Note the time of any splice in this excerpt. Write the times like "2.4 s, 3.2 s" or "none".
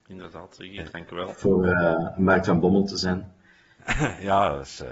none

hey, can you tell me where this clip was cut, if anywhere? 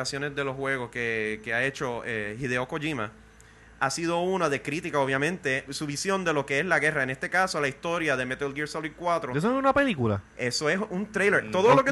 5.7 s

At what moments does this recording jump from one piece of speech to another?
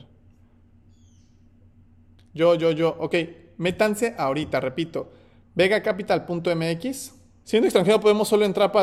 2.2 s, 7.4 s

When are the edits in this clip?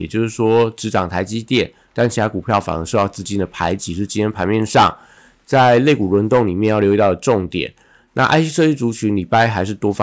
none

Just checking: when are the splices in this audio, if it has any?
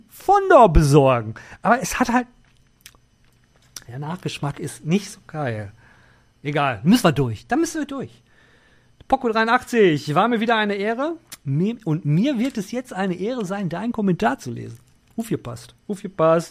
none

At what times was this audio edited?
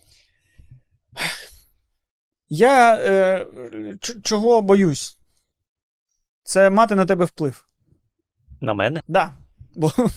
9.0 s

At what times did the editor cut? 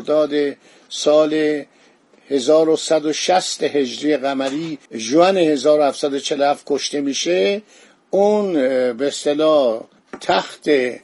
4.9 s

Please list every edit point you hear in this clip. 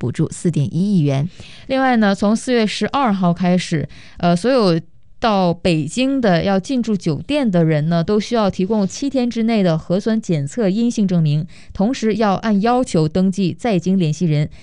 none

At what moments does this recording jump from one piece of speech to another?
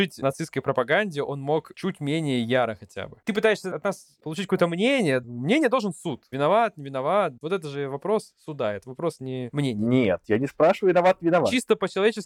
none

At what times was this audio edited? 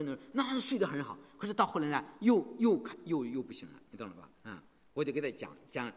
4.3 s

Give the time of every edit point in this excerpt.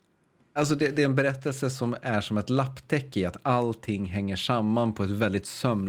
none

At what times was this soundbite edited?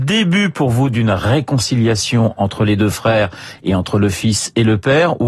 none

